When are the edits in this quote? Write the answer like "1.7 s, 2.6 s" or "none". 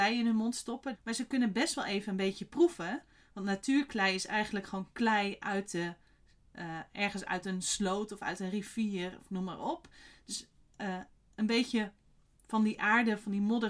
0.9 s